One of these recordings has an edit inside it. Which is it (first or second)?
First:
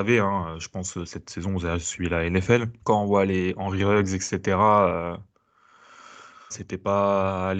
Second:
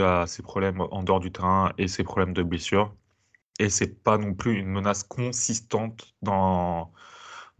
first